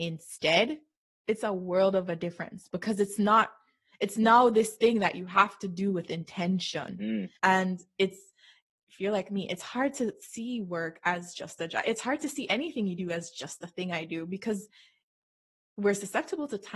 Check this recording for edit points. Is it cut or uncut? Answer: cut